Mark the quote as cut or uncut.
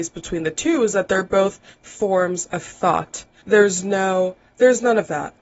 cut